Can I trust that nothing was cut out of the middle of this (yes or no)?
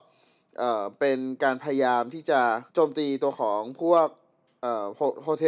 no